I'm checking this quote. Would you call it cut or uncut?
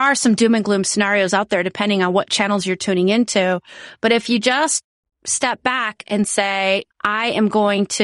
uncut